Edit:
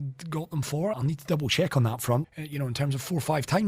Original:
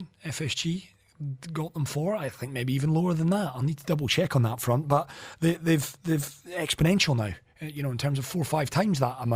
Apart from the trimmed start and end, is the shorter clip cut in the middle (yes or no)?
yes